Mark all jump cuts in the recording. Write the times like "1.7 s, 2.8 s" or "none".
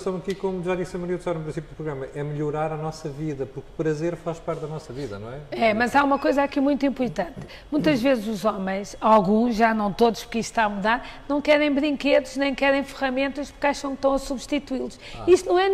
none